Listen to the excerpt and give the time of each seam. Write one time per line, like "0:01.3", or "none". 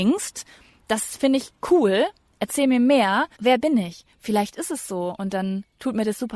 0:03.4